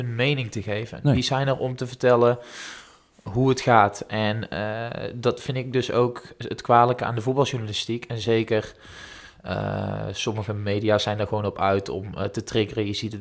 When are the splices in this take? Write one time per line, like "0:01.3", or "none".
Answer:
none